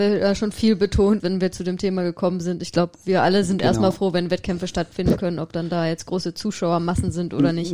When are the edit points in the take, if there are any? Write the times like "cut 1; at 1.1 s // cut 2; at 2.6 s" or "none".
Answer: cut 1; at 1.2 s